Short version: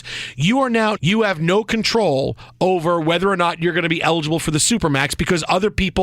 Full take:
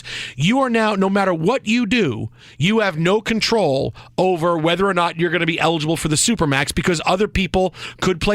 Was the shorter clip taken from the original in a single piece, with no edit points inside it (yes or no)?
no